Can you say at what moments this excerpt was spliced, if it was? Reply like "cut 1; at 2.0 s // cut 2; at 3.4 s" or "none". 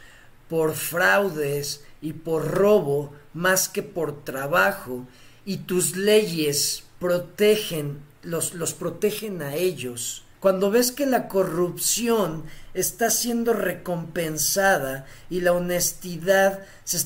cut 1; at 10.3 s